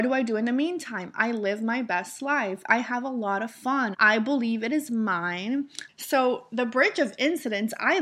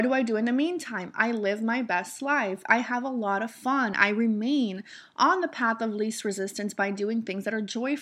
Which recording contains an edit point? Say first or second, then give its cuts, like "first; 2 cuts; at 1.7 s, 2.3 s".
first; 2 cuts; at 3.9 s, 5.9 s